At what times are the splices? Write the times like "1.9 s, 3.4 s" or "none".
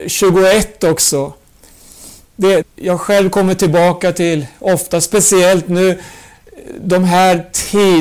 2.6 s